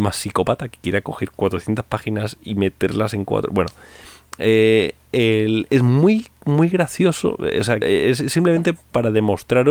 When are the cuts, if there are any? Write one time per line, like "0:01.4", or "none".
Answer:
0:07.8